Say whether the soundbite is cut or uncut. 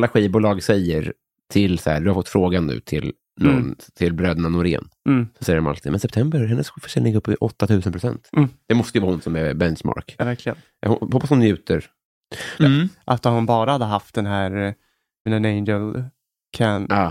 cut